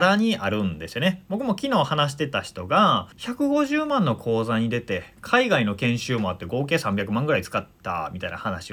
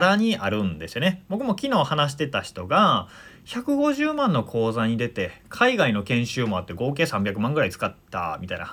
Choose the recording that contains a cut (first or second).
first